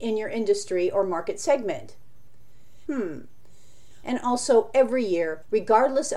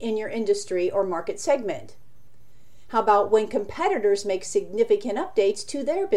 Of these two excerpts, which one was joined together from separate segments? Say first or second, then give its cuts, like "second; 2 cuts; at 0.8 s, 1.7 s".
first; 2 cuts; at 2.9 s, 4.0 s